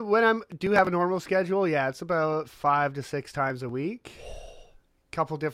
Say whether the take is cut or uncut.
uncut